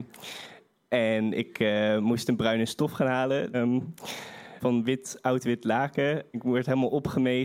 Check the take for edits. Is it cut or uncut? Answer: cut